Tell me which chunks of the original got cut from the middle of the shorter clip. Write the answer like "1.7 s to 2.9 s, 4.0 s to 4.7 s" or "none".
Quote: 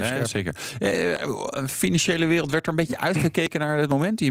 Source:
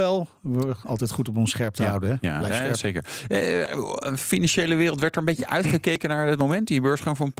none

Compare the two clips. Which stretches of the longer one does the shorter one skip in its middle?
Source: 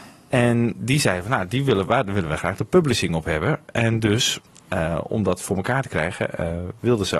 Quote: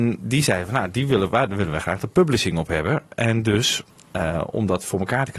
none

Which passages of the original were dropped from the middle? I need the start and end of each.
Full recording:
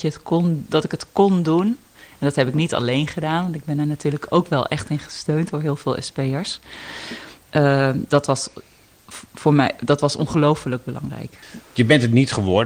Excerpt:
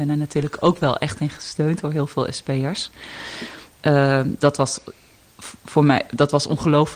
none

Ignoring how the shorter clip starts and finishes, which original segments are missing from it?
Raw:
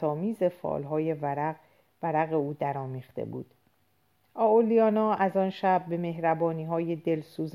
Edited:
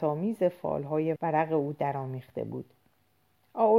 1.2 s to 2.0 s

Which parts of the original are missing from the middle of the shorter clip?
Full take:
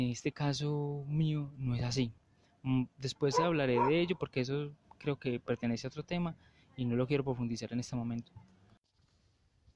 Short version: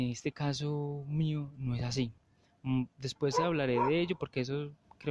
none

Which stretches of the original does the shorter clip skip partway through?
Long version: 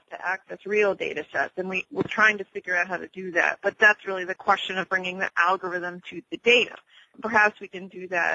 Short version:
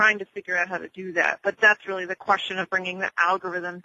none

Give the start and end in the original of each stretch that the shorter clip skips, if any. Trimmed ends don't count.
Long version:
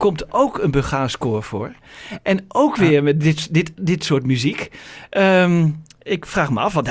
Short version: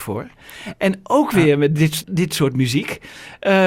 3.5 s to 3.7 s

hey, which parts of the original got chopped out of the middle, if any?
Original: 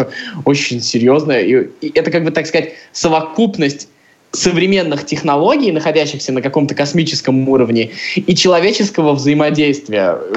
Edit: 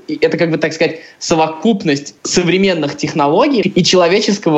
3.9 s to 4.3 s, 5.7 s to 8.1 s

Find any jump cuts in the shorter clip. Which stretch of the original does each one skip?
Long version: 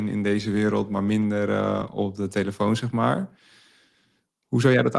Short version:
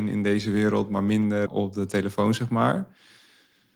1.5 s to 1.9 s

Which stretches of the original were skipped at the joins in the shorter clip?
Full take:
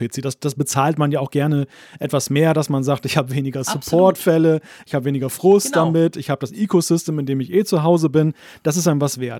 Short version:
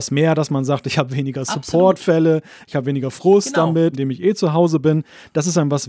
6.1 s to 7.2 s

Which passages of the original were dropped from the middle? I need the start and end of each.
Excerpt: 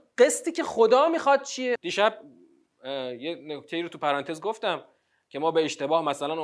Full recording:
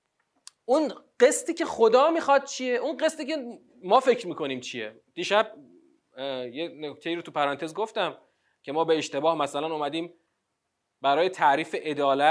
2.8 s to 5.1 s

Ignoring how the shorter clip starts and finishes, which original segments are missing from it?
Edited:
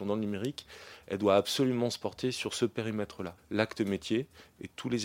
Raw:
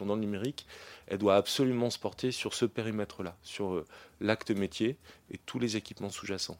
3.4 s to 4.1 s

